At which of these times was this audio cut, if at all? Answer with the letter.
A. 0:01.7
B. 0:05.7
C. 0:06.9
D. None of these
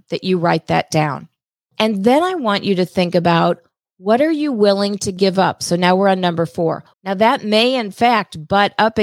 C